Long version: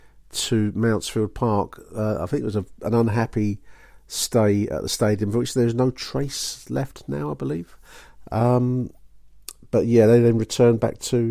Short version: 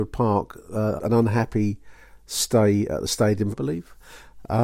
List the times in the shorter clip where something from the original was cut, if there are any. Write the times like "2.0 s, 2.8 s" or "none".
1.0 s, 3.5 s